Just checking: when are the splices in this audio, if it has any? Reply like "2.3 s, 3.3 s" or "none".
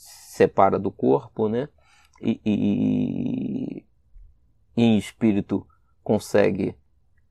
none